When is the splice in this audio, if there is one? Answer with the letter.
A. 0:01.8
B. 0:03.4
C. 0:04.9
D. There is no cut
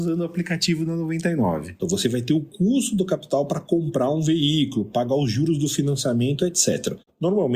A